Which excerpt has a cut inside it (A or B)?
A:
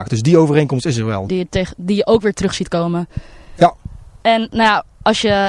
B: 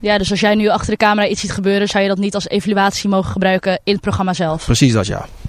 A